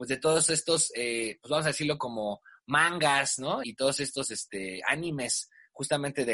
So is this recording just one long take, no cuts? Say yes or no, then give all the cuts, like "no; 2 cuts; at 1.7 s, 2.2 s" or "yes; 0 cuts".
no; 1 cut; at 3.6 s